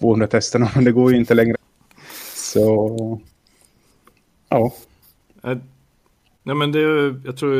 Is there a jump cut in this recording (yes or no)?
yes